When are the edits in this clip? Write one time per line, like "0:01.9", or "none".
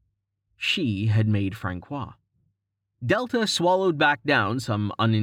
0:02.9